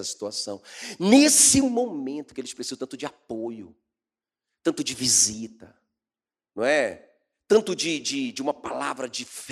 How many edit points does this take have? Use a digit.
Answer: 0